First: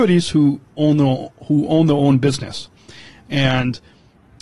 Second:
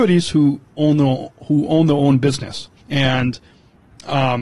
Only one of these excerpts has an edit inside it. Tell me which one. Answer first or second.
second